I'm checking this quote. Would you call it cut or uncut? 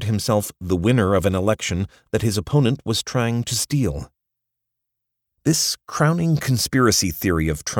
uncut